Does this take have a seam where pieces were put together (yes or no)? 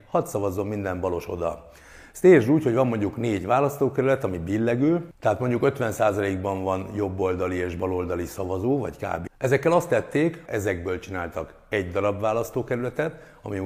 yes